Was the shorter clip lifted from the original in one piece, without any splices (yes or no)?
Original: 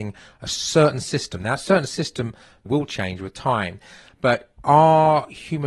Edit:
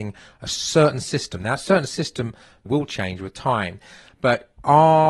yes